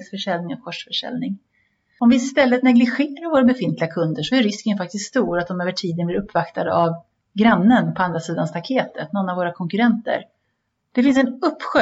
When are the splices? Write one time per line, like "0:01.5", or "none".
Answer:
0:10.8